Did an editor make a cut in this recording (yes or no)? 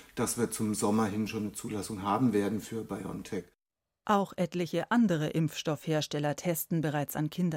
no